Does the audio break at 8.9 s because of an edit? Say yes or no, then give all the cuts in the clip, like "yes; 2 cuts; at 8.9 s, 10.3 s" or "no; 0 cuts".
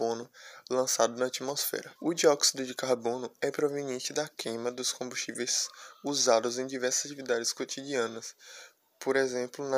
no; 1 cut; at 2.0 s